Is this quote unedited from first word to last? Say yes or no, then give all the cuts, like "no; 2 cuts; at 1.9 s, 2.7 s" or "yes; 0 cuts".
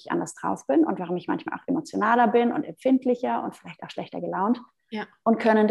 yes; 0 cuts